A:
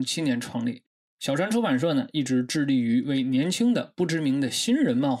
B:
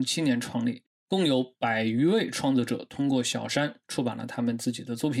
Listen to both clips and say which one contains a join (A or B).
B